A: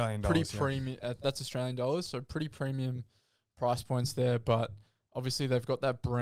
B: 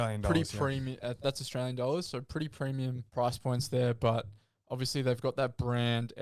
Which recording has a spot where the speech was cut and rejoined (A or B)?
B